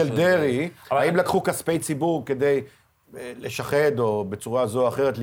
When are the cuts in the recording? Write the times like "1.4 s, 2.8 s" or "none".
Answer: none